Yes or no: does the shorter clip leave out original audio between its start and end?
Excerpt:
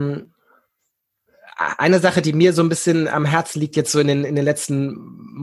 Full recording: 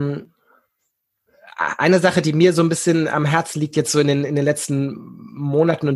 no